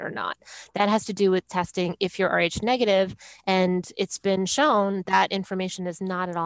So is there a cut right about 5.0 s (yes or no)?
yes